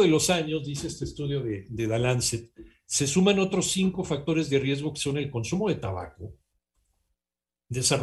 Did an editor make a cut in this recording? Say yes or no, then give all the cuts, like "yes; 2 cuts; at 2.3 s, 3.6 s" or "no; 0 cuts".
no; 0 cuts